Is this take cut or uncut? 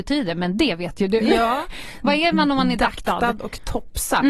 uncut